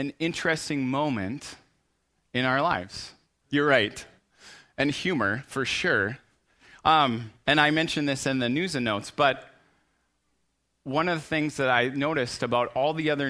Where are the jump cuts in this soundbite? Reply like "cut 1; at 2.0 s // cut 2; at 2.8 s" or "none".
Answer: cut 1; at 3.4 s